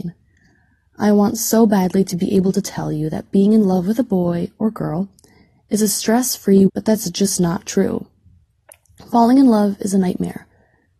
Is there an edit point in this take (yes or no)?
yes